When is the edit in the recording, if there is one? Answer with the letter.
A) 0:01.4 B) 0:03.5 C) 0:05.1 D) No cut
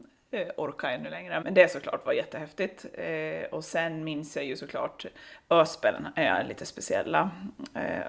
A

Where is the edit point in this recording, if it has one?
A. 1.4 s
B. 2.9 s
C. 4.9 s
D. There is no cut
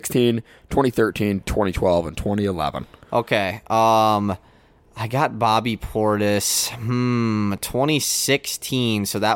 D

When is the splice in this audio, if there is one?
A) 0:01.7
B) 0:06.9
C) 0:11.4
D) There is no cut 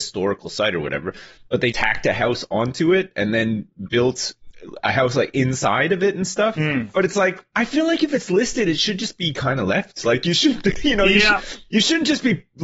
A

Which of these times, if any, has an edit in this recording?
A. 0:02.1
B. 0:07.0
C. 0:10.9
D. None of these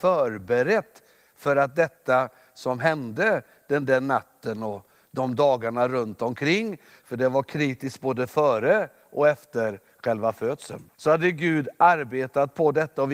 C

